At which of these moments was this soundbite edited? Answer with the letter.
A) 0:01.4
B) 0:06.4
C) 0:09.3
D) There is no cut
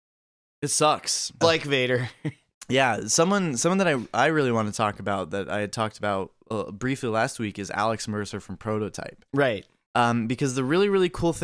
A